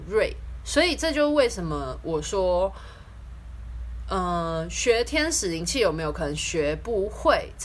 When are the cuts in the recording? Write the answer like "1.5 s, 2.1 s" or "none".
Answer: none